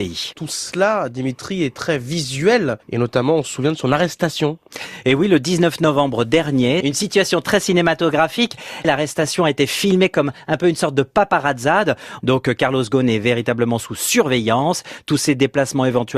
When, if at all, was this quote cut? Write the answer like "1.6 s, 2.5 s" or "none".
12.2 s

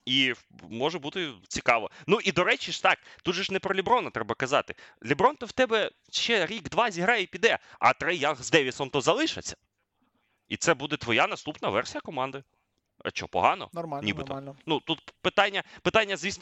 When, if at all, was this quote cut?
13.7 s

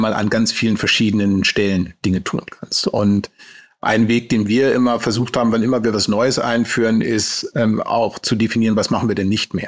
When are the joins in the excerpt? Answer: none

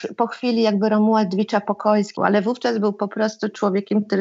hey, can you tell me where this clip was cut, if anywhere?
2.2 s

